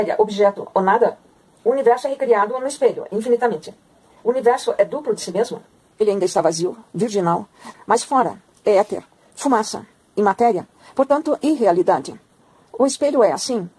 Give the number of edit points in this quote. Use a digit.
2